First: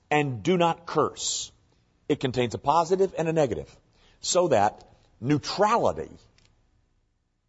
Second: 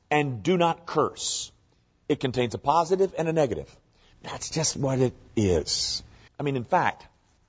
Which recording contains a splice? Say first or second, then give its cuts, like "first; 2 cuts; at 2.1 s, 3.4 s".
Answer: second; 2 cuts; at 4.1 s, 6.3 s